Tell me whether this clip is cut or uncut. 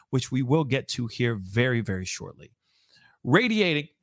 uncut